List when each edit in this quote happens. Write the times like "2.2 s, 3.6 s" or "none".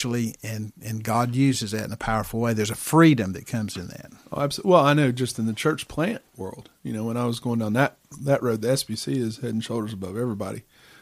none